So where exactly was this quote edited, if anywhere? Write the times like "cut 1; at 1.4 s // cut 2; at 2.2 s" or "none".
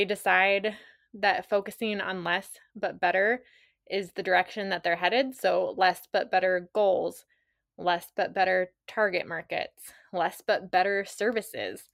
none